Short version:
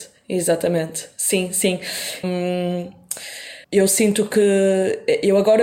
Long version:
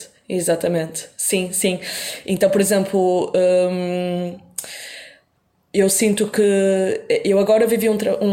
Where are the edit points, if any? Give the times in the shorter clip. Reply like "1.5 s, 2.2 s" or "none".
2.2 s, 3.6 s

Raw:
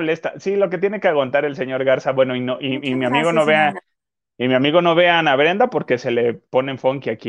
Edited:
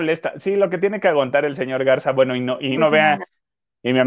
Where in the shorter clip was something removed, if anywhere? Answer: 2.8 s

